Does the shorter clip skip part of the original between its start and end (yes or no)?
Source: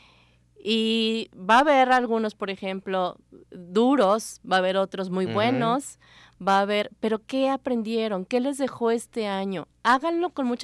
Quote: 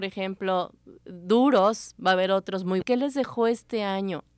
yes